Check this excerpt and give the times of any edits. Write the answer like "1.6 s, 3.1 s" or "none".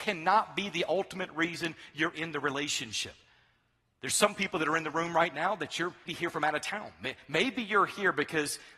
6.1 s